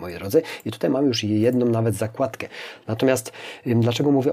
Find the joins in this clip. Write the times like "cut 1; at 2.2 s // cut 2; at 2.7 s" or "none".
cut 1; at 2.8 s